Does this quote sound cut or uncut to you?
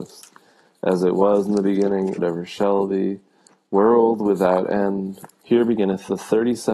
cut